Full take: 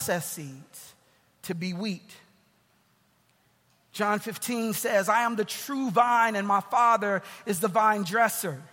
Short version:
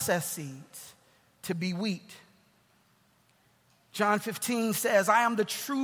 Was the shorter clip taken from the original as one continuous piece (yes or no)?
yes